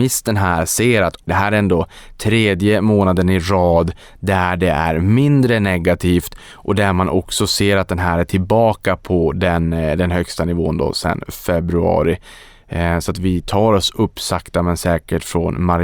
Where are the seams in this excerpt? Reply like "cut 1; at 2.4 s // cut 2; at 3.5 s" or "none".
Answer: cut 1; at 1.3 s